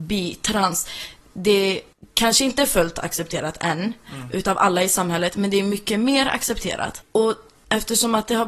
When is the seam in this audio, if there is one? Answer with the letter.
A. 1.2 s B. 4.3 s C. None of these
C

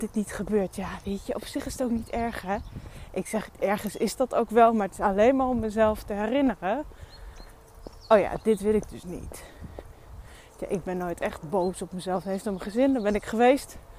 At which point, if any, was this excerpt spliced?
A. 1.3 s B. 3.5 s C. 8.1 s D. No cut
B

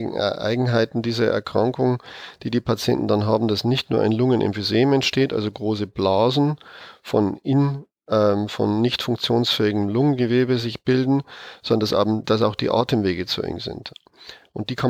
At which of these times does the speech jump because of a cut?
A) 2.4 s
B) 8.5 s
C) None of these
B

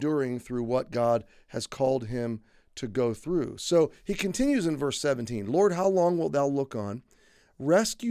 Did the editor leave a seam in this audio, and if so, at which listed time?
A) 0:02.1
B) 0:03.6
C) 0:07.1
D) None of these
D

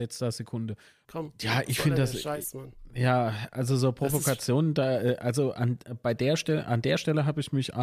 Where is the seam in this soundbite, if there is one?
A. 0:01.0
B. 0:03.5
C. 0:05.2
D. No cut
A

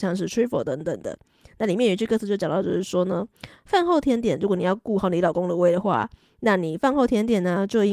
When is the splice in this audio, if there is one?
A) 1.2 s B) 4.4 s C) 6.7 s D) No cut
D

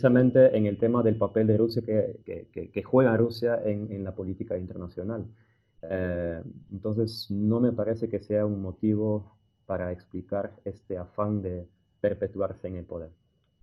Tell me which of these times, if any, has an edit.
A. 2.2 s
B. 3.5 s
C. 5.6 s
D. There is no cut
A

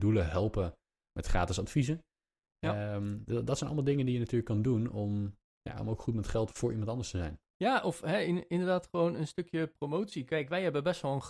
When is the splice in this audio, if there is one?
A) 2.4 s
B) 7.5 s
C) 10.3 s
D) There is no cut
B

